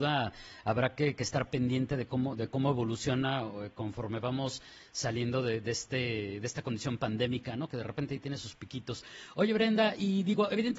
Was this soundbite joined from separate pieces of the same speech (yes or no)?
no